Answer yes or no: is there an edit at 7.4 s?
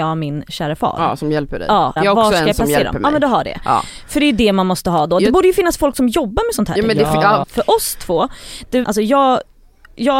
yes